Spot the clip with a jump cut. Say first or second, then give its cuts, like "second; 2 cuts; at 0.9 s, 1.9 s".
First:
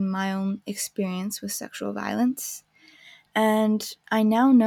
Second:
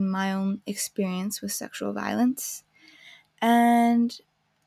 first; 1 cut; at 3.3 s